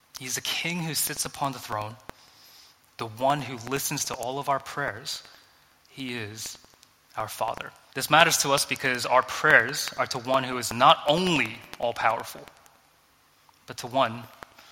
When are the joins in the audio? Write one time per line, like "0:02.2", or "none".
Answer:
0:07.9